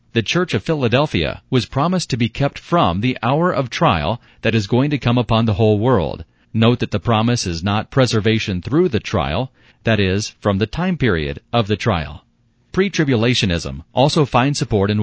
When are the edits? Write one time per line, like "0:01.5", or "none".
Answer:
0:06.4
0:09.7